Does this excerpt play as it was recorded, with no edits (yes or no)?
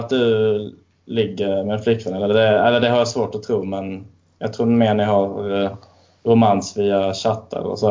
yes